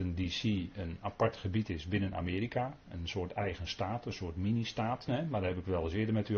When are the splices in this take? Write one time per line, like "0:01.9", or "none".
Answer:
0:05.1